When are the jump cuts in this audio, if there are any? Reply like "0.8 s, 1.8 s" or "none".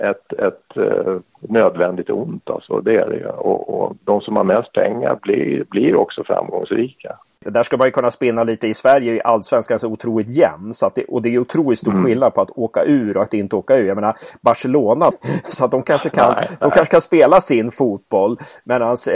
15.1 s

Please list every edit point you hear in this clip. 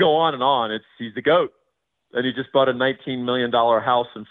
1.9 s

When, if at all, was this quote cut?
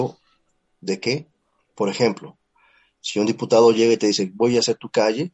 1.6 s

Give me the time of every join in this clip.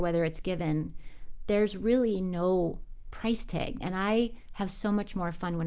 3.8 s

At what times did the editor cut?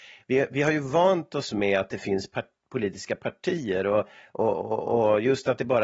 none

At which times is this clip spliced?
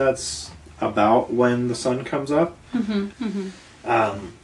3.1 s

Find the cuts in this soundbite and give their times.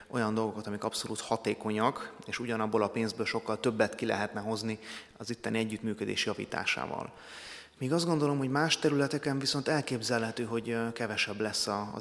none

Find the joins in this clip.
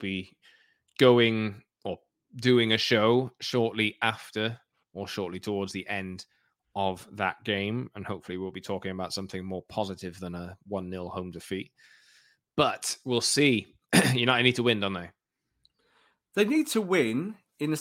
none

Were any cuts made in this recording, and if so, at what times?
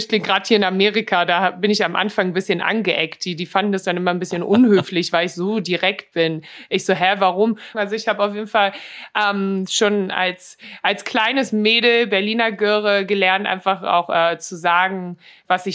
7.7 s

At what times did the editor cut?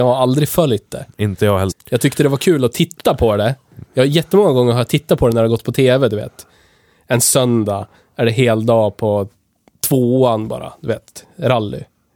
1.7 s

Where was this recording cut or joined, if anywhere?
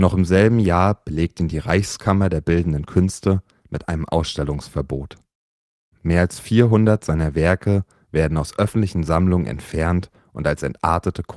none

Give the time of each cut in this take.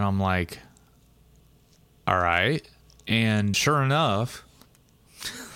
3.5 s

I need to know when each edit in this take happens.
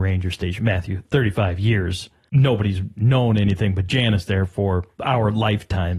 none

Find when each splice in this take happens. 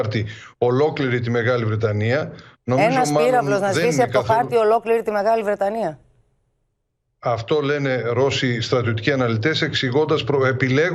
none

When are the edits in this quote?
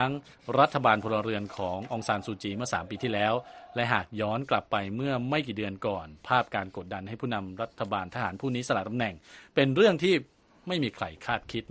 none

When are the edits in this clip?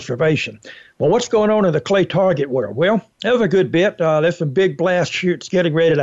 3.1 s

